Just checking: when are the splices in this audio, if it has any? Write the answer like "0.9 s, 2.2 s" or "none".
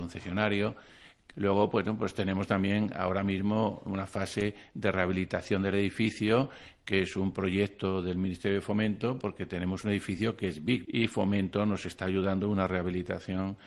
1.3 s, 10.8 s

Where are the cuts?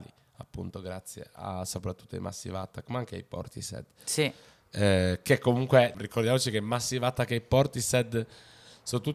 5.9 s

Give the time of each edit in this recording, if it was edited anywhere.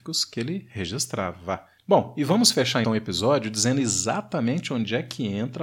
2.8 s

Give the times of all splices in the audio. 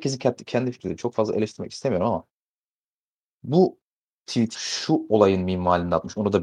4.5 s

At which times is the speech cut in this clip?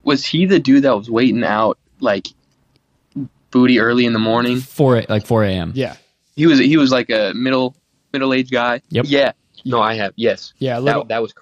none

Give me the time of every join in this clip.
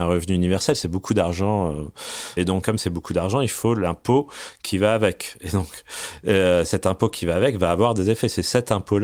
2.4 s

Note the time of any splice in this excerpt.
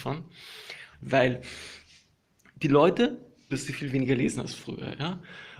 0.9 s, 3.5 s

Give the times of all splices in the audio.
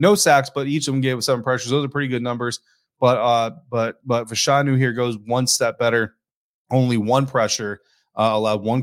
none

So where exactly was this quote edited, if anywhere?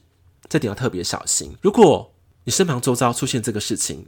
1.6 s

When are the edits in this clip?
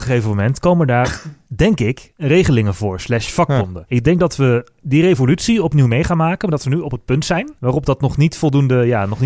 none

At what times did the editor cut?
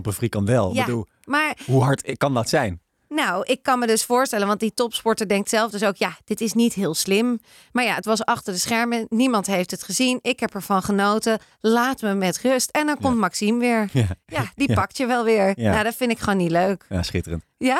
none

